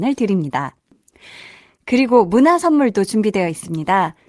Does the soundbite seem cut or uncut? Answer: uncut